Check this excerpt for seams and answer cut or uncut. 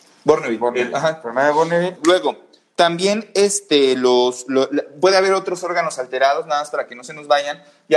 cut